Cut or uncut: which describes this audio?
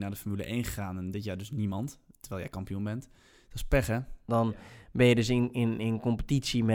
cut